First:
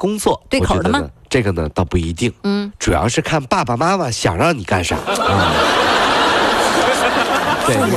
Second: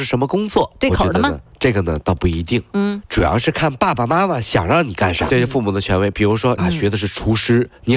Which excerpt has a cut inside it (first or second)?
second